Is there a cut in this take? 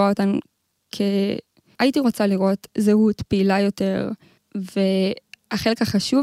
yes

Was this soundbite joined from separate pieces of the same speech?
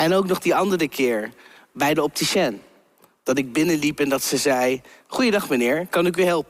no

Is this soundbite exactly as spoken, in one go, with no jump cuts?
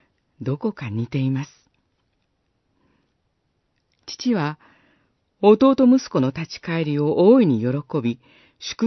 yes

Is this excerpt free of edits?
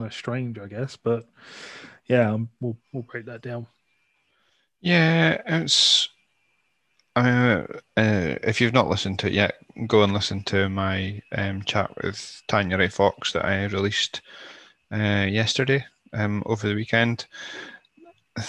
yes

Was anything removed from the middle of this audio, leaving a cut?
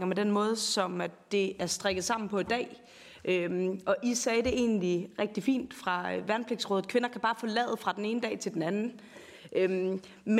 no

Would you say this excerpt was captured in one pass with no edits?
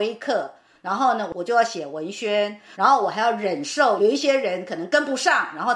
no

